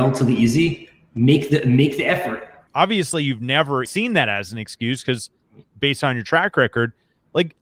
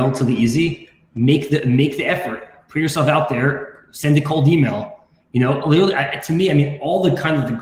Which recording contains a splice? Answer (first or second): first